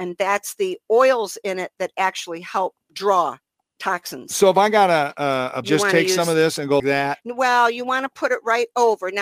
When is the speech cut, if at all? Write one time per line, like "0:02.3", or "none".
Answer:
0:05.6
0:06.8